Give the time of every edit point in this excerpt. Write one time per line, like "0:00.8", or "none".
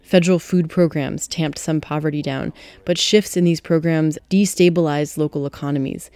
0:04.2